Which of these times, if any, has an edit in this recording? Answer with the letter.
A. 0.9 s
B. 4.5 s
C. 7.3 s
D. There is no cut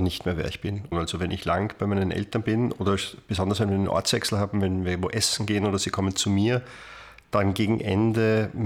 A